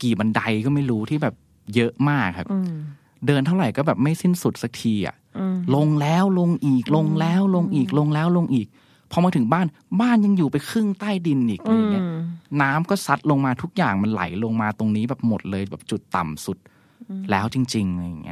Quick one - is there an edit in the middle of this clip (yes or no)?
no